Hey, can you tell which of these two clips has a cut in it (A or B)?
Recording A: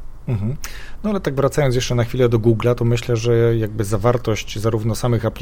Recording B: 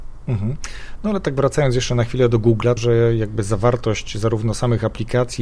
B